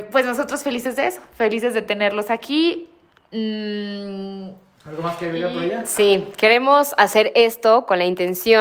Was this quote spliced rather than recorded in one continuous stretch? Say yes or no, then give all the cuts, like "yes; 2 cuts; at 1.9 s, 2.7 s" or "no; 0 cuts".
no; 0 cuts